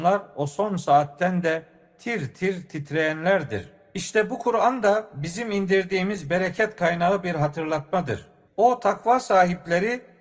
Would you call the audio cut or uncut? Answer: cut